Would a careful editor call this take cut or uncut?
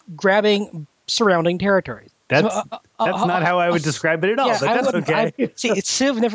cut